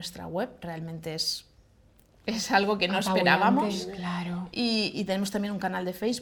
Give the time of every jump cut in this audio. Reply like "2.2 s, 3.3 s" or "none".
4.9 s